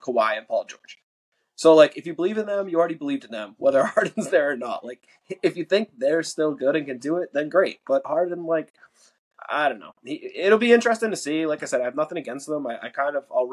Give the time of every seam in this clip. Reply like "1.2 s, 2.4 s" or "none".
none

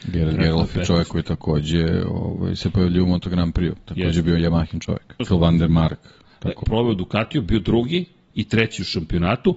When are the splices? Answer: 5.2 s, 6.6 s

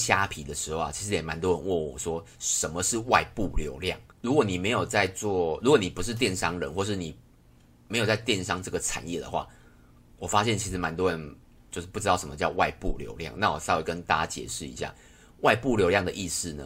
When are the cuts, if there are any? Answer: 4.1 s

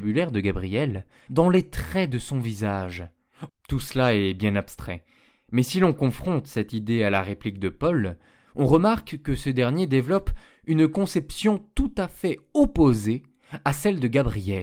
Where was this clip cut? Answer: 1.3 s, 3.5 s

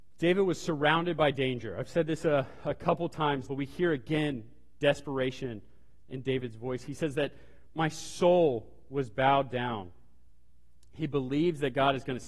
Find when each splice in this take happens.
3.5 s

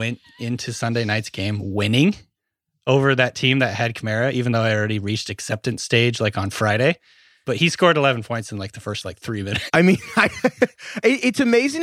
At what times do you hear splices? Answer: 7.4 s, 9.7 s

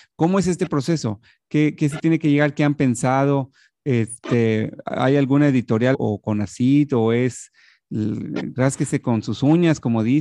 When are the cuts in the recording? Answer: 5.9 s

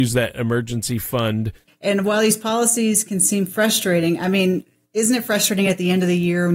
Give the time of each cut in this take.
1.7 s

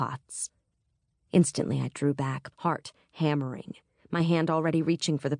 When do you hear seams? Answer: 1.2 s, 2.5 s

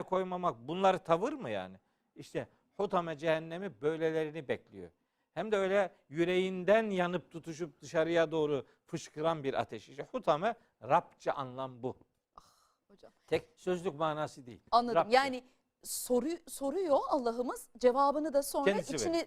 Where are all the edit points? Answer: none

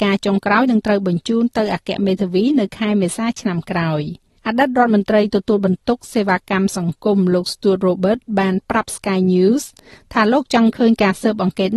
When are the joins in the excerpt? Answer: 4.4 s

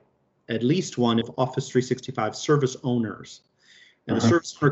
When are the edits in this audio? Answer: 1.2 s

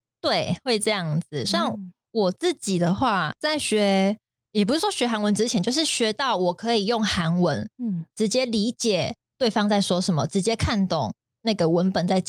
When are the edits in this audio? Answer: 3.3 s

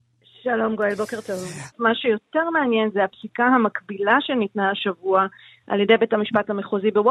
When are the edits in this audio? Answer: 1.7 s

